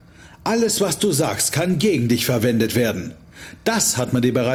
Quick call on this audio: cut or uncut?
uncut